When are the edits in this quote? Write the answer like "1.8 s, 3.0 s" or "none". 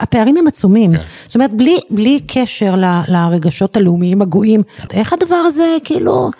4.9 s